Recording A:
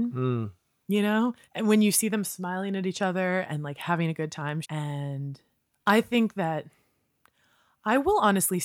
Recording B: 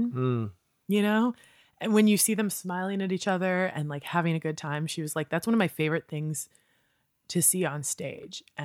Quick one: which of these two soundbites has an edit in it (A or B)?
A